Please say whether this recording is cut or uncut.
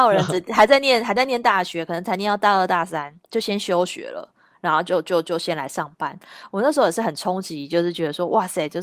uncut